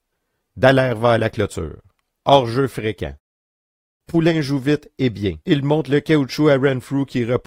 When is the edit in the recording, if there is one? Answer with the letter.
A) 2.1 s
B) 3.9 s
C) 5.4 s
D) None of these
C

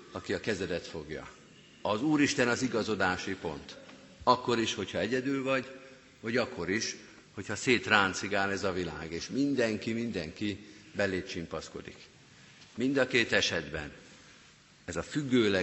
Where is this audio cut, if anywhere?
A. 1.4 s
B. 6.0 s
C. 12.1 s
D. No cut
D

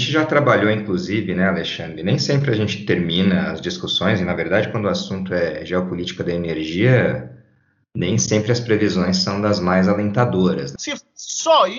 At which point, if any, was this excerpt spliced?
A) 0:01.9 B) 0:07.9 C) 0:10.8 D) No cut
C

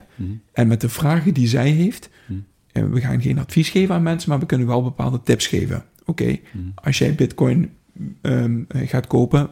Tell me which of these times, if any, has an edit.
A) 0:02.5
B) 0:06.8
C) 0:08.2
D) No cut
A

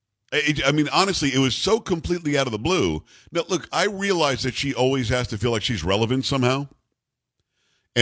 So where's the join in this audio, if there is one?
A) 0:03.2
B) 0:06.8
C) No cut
C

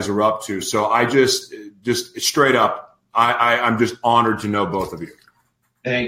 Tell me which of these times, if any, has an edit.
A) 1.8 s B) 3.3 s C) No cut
C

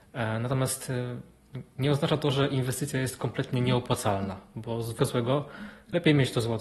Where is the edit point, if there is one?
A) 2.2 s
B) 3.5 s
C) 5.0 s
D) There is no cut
C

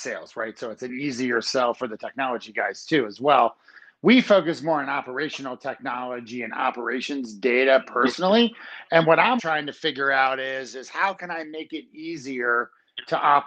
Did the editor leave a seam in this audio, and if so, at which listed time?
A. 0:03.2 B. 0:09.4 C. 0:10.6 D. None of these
B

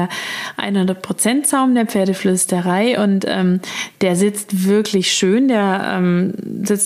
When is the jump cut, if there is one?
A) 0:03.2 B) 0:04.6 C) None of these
C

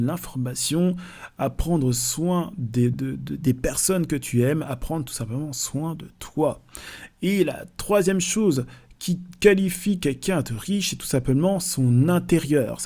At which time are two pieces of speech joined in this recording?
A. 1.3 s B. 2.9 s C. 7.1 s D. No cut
B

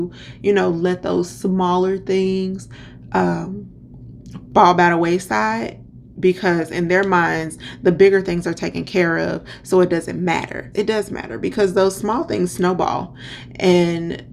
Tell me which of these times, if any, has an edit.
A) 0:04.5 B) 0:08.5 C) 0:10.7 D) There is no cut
C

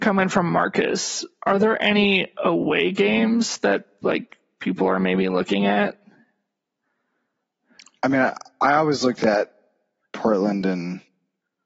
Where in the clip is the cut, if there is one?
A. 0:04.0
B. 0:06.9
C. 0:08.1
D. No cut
D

